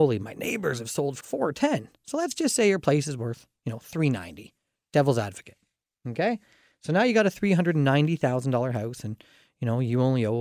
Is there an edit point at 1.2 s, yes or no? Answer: yes